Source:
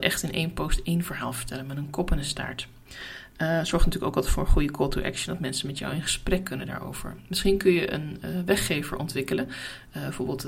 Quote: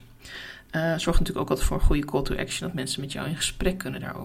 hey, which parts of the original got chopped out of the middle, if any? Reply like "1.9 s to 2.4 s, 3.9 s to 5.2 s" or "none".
none